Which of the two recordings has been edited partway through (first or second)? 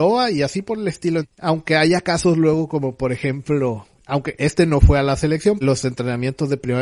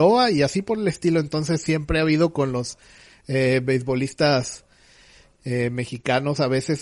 first